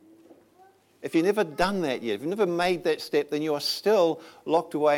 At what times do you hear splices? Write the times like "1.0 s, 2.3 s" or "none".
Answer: none